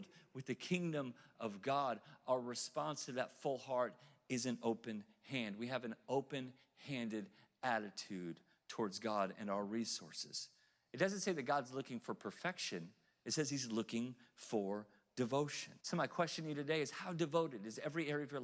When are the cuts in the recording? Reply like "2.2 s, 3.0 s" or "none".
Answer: 15.8 s